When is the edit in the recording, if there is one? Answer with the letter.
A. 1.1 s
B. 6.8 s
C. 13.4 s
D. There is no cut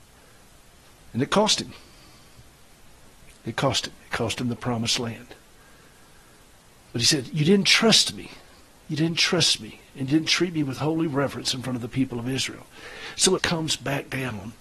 C